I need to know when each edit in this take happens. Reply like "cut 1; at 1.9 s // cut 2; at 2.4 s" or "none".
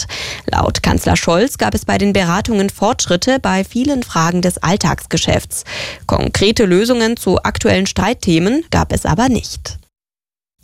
cut 1; at 8.7 s